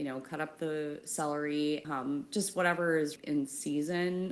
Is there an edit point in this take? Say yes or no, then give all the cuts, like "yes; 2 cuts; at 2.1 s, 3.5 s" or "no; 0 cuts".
yes; 2 cuts; at 1.8 s, 3.2 s